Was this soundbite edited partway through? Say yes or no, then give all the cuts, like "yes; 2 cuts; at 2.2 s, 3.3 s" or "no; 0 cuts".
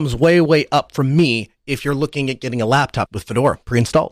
yes; 1 cut; at 3.1 s